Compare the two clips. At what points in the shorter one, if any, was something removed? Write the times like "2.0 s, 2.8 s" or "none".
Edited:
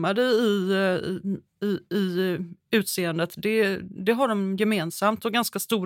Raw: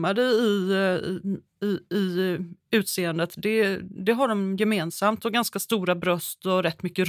none